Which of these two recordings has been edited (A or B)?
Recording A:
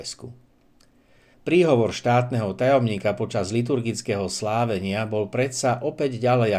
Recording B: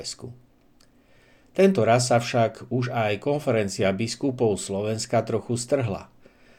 A